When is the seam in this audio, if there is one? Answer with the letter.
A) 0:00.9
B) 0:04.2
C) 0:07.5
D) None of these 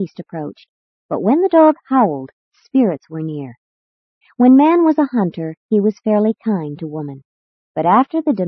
B